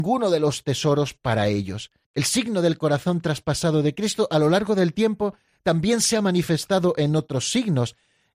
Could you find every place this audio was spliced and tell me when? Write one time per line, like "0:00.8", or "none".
0:02.0